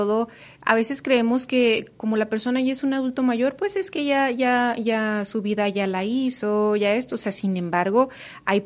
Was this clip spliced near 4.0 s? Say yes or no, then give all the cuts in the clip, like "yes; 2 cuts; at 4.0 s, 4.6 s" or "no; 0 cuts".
no; 0 cuts